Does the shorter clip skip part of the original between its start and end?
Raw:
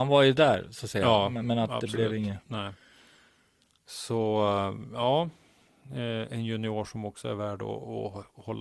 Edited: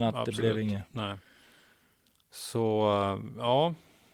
no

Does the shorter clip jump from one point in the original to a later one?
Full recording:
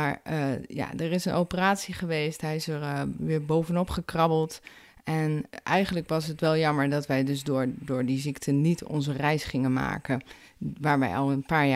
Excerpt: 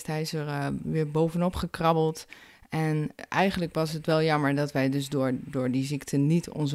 no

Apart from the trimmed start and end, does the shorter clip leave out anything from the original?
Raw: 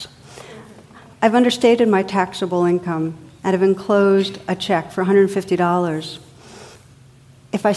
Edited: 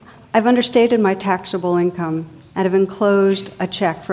no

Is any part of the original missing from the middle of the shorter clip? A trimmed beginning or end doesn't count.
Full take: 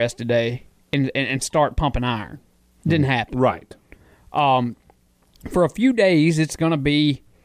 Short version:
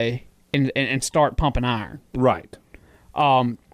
yes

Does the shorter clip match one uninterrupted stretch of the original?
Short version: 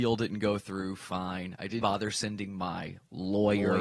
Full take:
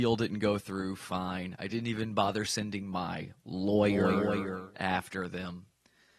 no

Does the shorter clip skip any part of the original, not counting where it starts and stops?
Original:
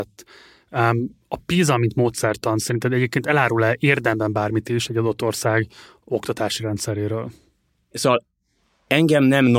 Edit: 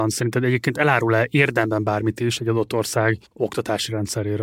yes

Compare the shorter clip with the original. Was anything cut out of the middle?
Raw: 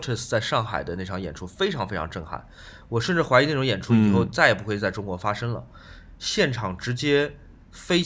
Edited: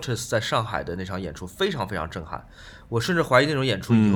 no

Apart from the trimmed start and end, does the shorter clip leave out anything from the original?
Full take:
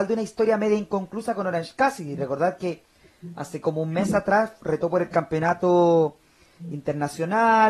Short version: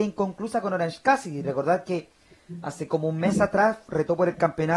no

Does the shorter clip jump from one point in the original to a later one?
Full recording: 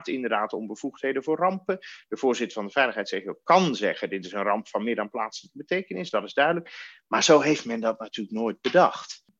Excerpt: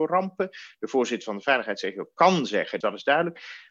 yes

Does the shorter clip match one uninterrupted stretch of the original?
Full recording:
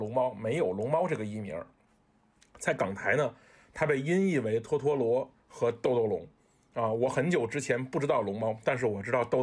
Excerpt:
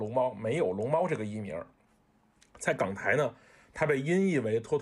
yes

